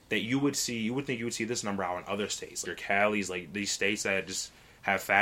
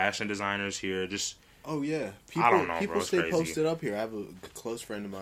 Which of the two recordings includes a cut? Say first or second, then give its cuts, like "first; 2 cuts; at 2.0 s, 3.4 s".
first; 1 cut; at 2.7 s